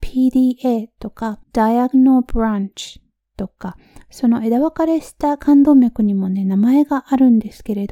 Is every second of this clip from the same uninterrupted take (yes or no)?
no